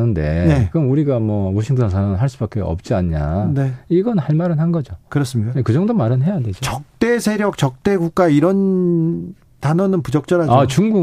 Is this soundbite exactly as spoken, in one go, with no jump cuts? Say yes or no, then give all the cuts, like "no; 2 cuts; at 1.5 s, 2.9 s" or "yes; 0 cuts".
yes; 0 cuts